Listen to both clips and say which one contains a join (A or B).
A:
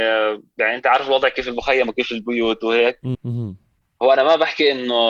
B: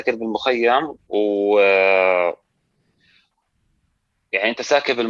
A